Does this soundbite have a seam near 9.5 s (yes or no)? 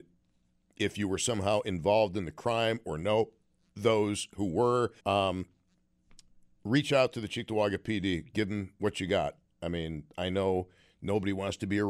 no